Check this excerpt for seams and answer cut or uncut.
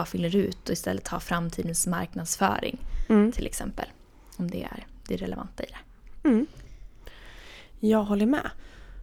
uncut